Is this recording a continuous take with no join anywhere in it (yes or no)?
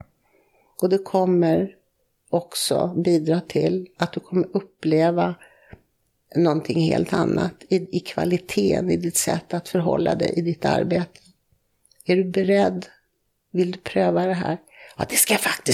yes